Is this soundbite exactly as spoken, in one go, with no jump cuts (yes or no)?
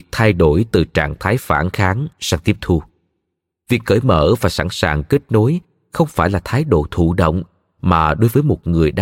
yes